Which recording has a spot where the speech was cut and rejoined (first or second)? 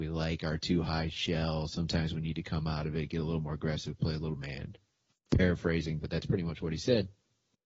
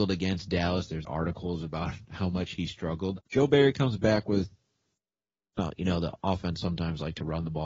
second